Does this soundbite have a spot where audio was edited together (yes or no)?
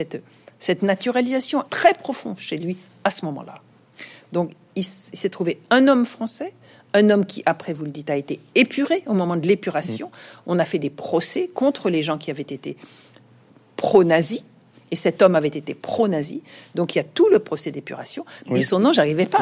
yes